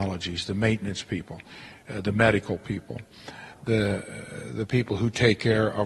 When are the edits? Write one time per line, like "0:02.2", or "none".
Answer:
none